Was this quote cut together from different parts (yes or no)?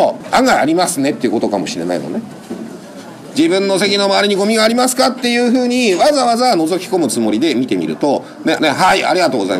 yes